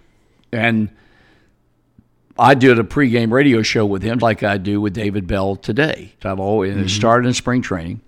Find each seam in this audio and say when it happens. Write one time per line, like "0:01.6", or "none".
0:04.2
0:06.2